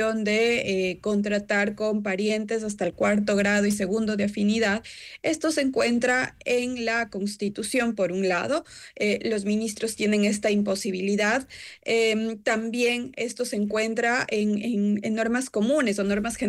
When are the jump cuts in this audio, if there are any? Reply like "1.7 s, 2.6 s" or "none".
none